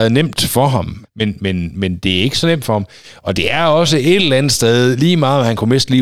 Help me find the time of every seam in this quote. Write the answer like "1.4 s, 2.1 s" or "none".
1.0 s